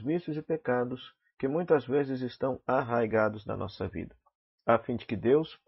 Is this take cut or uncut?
uncut